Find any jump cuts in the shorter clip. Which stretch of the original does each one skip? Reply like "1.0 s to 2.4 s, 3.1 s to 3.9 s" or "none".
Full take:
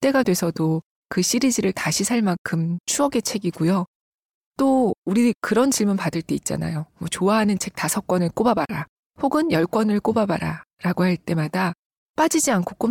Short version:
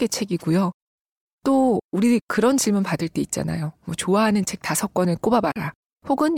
none